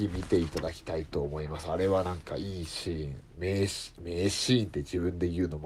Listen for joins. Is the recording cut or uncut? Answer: uncut